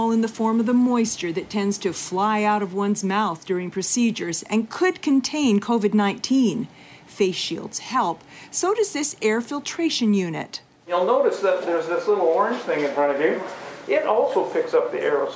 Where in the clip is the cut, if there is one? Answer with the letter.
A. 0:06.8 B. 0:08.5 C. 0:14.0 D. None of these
D